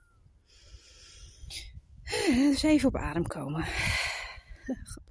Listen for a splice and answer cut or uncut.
uncut